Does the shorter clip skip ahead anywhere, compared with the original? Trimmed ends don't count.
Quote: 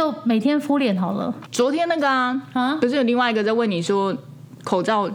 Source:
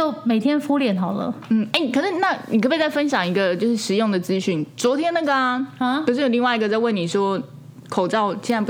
yes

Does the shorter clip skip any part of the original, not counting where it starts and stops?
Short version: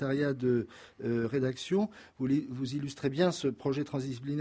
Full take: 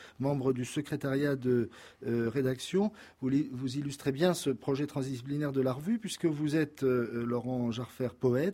no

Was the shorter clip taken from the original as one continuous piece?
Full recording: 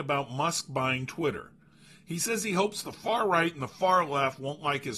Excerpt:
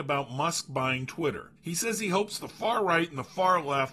no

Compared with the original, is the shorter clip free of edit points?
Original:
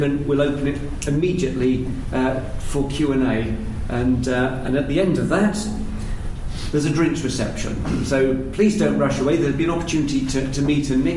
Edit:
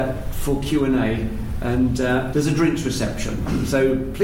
no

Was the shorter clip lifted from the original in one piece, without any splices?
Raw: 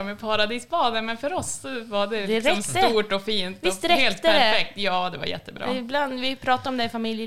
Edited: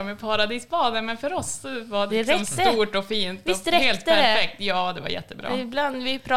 no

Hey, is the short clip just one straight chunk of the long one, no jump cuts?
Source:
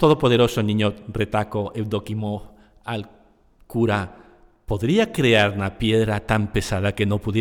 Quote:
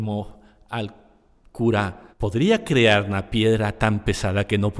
no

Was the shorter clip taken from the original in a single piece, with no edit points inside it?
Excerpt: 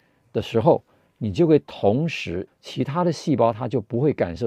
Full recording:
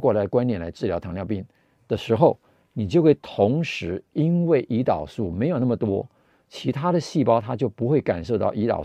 no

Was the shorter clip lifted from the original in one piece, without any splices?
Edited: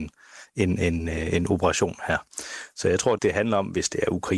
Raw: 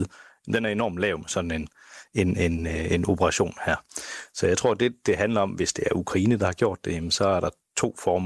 no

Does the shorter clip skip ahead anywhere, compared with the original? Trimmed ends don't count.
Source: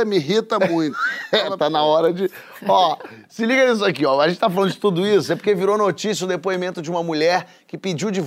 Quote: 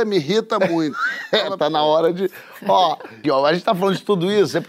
yes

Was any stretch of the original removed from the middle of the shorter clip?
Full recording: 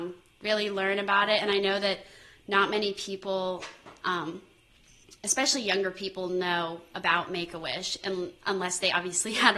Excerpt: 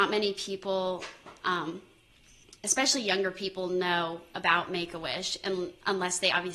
no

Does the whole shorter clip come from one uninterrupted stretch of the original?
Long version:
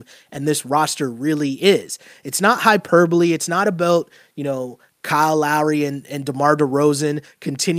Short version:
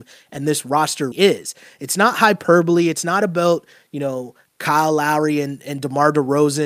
no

